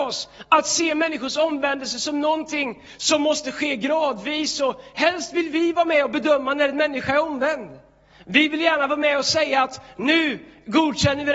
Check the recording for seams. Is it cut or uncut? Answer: uncut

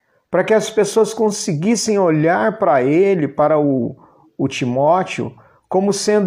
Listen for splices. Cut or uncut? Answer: uncut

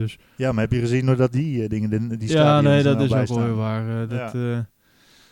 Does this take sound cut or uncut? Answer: uncut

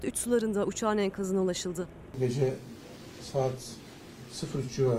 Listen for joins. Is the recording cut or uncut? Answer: cut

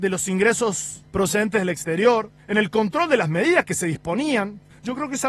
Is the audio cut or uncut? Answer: uncut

